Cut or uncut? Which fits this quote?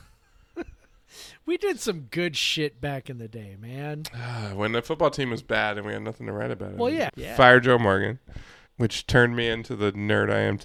cut